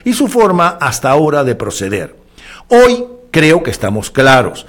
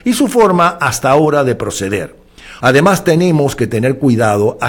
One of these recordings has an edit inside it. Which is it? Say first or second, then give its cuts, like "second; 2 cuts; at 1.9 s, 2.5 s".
second; 1 cut; at 2.6 s